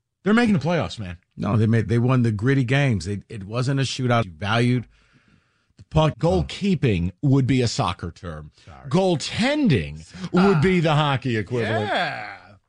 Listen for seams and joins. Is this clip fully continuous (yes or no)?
no